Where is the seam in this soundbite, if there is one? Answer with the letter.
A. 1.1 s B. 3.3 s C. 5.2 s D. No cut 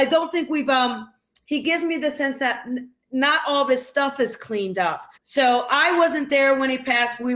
C